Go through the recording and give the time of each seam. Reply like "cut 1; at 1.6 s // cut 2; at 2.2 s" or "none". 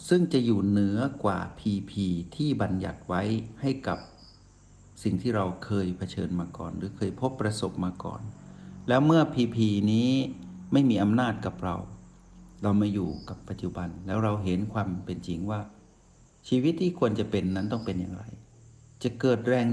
none